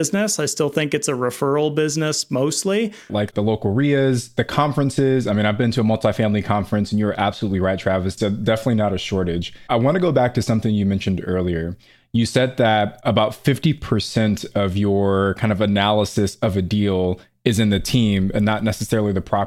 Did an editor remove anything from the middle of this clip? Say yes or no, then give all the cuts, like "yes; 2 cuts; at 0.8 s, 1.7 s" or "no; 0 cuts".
yes; 2 cuts; at 3.1 s, 8.2 s